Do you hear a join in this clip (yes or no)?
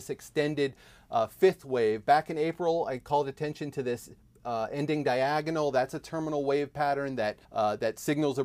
yes